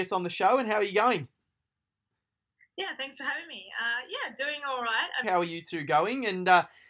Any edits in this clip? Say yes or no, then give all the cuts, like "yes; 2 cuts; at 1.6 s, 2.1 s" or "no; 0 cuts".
yes; 1 cut; at 5.2 s